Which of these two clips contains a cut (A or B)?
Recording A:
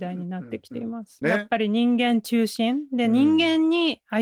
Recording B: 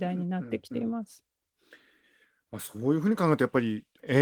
A